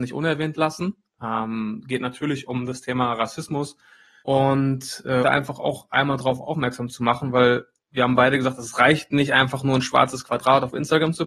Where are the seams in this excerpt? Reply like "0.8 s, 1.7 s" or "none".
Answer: 4.2 s, 5.2 s